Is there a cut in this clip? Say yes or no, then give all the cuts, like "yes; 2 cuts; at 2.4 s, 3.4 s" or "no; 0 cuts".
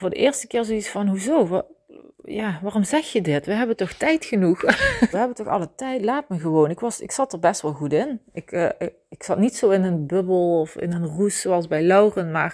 yes; 1 cut; at 5.1 s